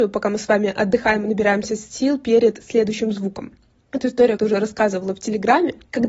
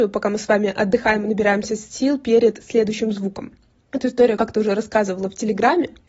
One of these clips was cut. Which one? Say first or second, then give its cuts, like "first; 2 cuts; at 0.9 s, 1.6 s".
first; 1 cut; at 4.4 s